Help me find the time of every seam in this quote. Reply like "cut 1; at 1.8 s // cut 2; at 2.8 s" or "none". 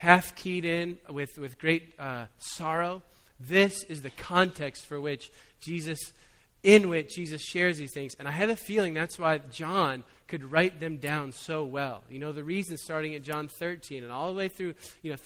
none